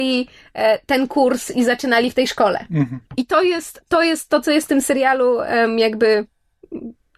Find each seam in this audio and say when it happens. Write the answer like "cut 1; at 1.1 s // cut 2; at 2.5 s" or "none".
cut 1; at 3.1 s